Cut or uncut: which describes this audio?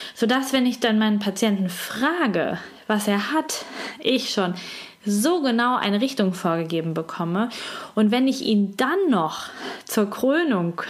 uncut